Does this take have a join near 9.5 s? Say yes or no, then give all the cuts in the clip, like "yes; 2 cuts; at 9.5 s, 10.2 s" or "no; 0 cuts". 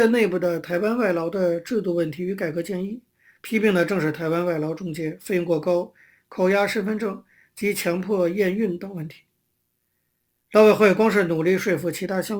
no; 0 cuts